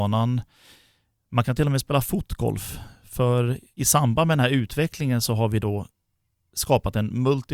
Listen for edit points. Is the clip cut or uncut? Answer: uncut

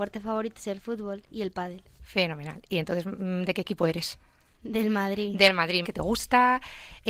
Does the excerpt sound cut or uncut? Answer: cut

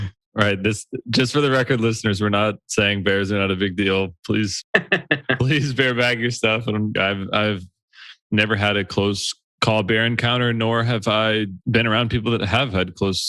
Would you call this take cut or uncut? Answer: cut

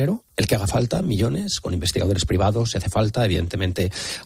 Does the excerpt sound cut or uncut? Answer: uncut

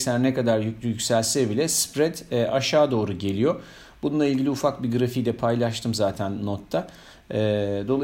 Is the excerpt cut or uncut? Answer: uncut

